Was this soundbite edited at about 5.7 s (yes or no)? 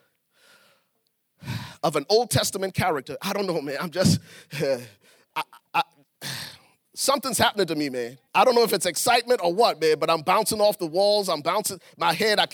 yes